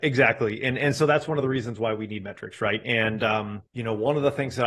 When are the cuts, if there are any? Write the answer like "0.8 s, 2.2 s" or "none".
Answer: 3.7 s